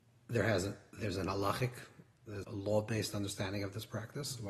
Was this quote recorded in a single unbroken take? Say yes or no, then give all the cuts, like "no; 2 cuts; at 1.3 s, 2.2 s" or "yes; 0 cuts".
no; 1 cut; at 2.4 s